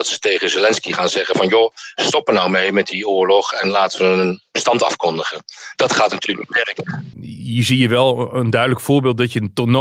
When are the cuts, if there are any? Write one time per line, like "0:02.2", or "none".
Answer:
0:07.1